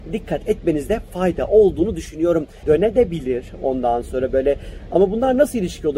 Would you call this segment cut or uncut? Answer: cut